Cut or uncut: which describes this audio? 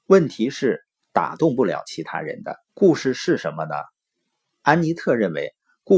cut